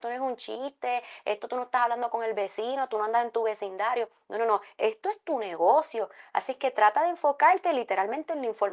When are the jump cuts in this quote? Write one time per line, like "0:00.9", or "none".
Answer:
none